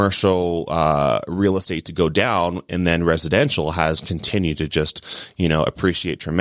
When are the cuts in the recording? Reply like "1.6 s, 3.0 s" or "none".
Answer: none